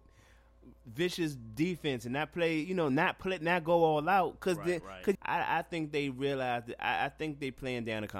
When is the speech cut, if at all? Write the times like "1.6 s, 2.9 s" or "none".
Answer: 5.1 s